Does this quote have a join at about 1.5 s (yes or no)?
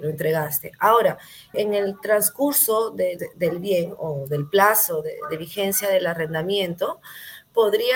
yes